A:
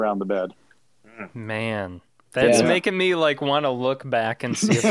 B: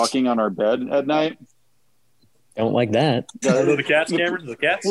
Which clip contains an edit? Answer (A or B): B